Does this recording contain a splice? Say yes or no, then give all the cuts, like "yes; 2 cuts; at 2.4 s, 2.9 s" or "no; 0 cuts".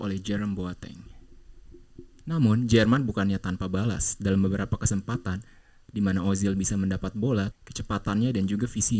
yes; 1 cut; at 7.5 s